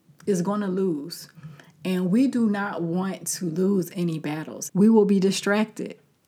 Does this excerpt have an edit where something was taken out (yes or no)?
yes